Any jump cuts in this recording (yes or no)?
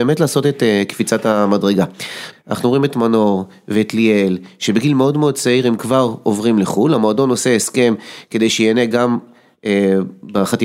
yes